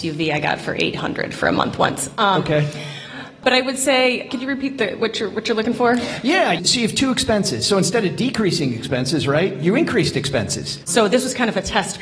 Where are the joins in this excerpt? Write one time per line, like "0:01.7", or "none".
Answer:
0:04.3
0:10.8